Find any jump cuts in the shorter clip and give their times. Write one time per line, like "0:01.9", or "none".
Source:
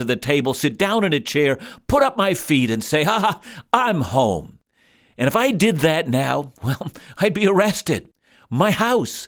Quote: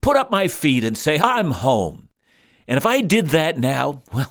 0:01.2